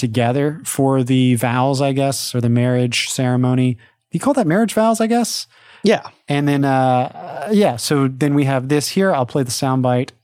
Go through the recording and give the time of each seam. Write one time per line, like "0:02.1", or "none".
none